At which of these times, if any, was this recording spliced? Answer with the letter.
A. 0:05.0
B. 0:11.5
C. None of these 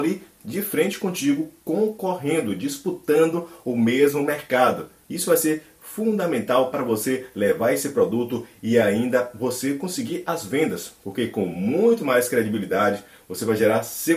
A